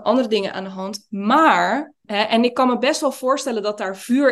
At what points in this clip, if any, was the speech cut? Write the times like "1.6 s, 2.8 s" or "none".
2.0 s